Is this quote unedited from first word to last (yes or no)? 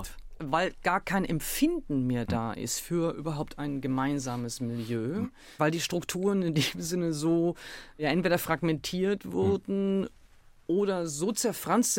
yes